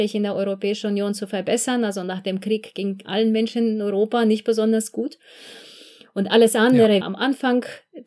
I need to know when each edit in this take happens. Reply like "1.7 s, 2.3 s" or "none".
7.0 s